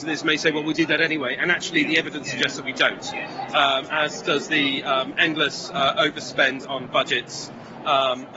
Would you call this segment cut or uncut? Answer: uncut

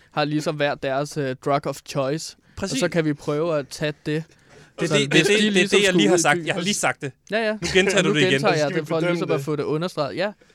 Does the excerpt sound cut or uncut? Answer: uncut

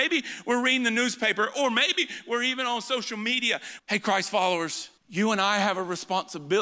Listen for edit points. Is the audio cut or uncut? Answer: cut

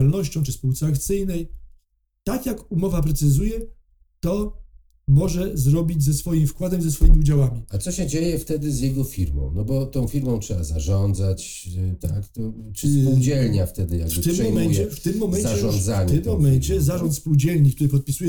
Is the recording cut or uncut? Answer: uncut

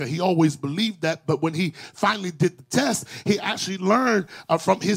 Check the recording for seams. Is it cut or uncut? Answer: uncut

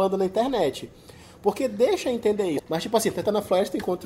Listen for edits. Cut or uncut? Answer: cut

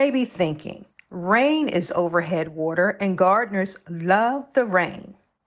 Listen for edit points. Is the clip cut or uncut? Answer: uncut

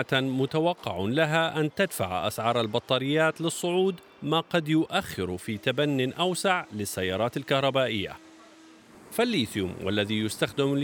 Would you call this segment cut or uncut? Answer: uncut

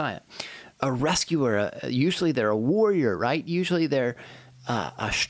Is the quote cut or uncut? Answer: uncut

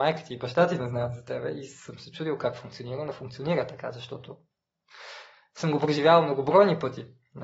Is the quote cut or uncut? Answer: uncut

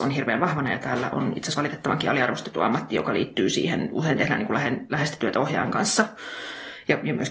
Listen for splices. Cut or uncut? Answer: uncut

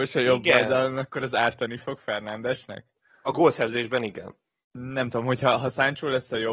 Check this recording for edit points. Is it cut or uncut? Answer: cut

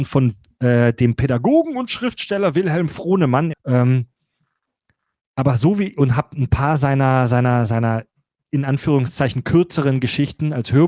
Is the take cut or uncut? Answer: cut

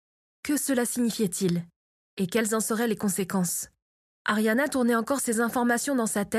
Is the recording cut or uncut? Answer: uncut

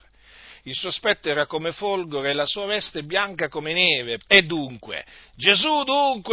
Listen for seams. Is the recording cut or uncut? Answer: cut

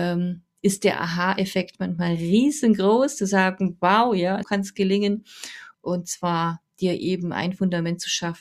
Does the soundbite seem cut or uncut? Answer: cut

